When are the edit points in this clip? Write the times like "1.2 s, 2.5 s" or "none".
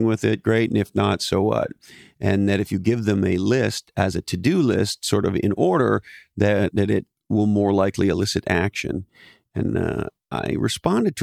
none